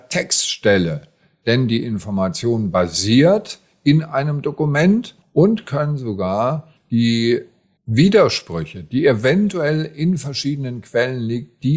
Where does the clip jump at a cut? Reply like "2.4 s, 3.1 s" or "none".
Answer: none